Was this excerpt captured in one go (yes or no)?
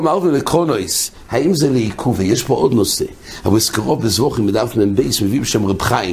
yes